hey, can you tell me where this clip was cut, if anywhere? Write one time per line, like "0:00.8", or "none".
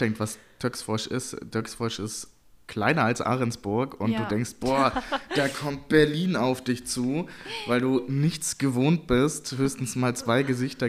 none

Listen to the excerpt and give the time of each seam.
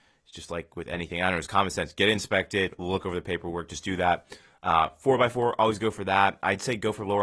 none

